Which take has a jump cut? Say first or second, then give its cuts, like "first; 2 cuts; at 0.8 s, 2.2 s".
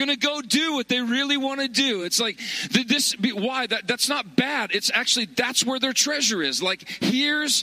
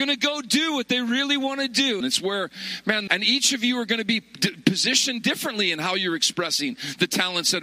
second; 2 cuts; at 2.0 s, 3.1 s